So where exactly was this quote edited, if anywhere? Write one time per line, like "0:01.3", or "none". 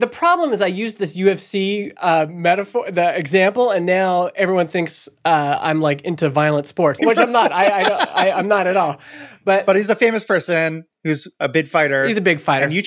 0:07.0